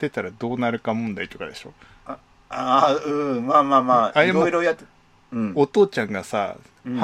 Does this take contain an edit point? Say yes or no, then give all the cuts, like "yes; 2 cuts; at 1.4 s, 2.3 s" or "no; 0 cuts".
no; 0 cuts